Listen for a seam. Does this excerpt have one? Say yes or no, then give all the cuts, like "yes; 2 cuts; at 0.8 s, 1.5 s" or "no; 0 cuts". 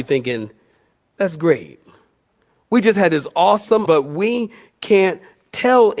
yes; 1 cut; at 3.8 s